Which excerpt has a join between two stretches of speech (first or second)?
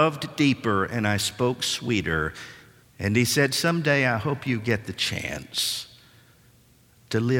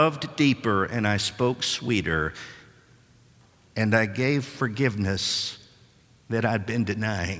first